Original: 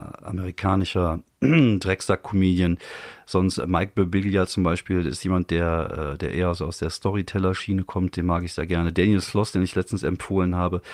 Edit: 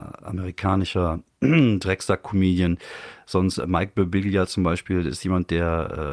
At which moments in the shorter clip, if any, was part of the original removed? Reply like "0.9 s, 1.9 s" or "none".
none